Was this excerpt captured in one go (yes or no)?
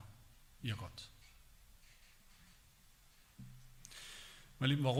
yes